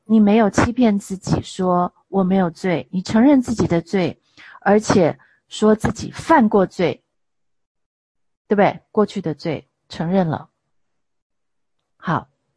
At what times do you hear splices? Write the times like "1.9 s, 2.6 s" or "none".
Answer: none